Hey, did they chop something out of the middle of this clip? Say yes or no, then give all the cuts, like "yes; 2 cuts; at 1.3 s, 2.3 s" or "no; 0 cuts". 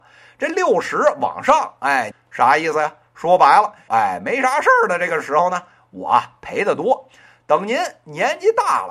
yes; 2 cuts; at 2.1 s, 3.9 s